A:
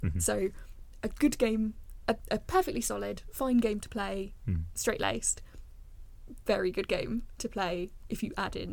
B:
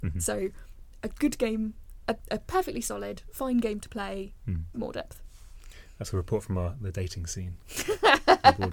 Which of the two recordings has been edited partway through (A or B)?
B